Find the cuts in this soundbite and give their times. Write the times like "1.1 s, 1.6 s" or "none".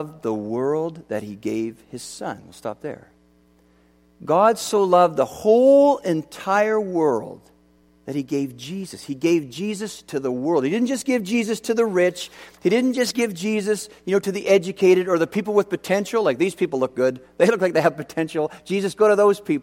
none